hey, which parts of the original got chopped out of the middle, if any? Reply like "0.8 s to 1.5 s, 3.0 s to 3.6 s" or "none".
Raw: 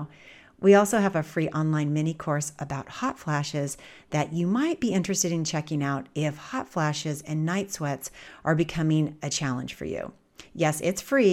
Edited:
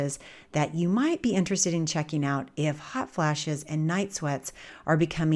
none